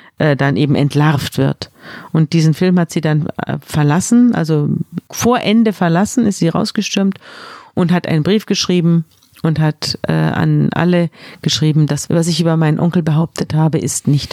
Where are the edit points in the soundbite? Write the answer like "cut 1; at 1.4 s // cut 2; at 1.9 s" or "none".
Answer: none